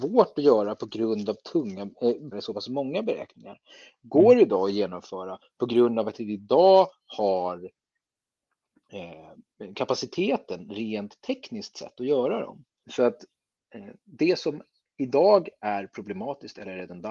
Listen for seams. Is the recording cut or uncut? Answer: cut